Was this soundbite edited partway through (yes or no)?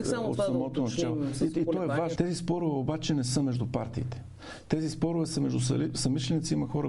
yes